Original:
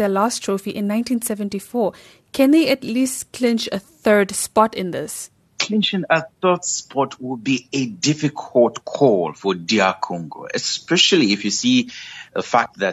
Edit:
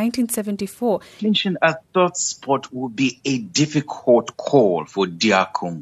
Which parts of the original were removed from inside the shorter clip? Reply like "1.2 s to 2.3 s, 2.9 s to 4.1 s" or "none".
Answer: 2.1 s to 5.7 s